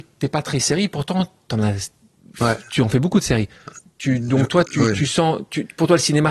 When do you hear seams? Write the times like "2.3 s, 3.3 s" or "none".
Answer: 4.7 s